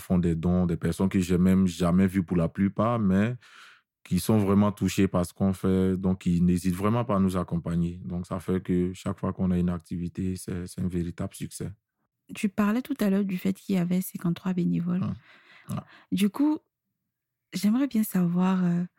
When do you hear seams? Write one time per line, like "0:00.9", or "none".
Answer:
0:15.6